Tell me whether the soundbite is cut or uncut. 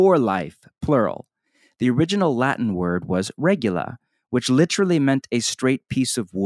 uncut